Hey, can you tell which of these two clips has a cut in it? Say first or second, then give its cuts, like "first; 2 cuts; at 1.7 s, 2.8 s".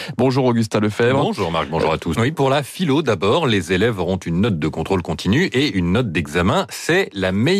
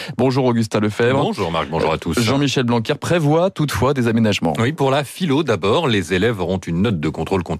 first; 1 cut; at 2.2 s